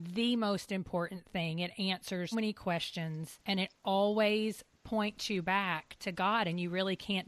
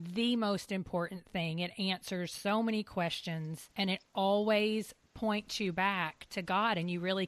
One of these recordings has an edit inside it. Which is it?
first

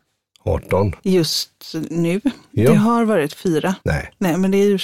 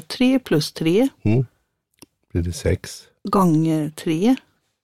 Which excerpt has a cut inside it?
first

